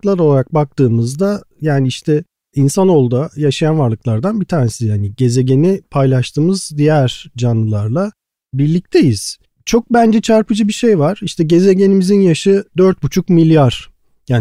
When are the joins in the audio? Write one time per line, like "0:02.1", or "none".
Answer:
none